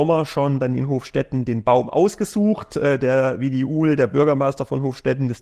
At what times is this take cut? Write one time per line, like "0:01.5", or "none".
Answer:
none